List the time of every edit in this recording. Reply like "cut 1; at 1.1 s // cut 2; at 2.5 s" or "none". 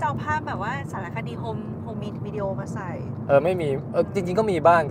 cut 1; at 1.9 s